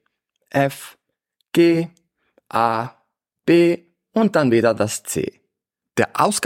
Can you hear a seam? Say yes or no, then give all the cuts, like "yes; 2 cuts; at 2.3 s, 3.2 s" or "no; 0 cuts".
no; 0 cuts